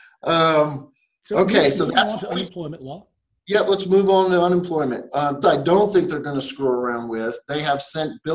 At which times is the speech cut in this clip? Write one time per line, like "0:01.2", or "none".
0:05.4

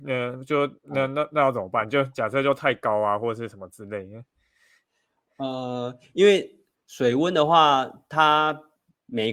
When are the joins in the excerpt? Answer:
none

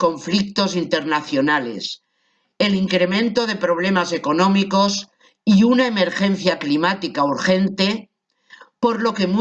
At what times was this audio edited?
none

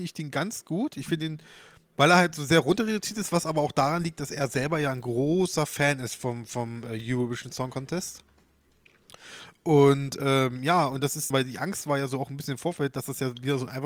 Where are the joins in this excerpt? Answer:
0:11.3

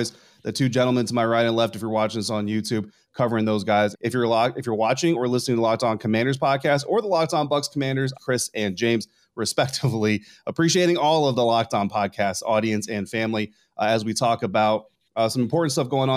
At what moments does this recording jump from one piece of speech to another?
0:03.9
0:08.1

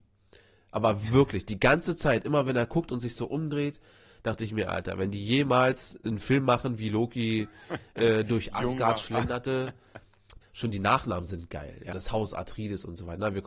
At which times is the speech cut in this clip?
0:10.4
0:11.9

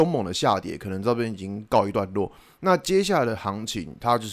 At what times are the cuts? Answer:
none

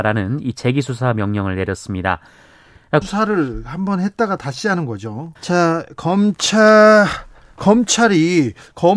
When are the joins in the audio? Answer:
0:03.0
0:05.4

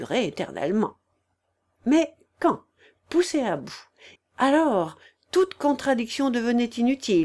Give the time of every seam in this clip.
0:01.7
0:04.2

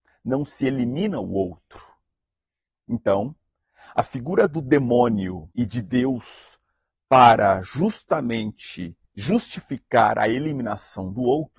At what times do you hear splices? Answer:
0:02.7
0:05.5
0:09.0

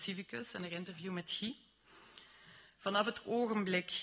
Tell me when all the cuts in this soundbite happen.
none

